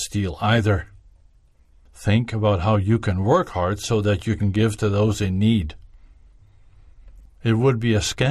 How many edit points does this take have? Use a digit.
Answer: 1